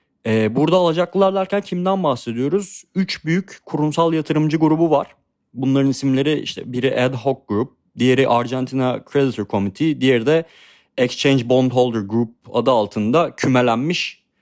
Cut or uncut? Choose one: uncut